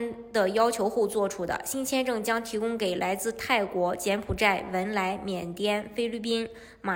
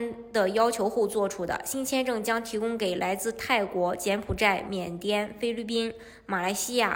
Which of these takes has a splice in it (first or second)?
second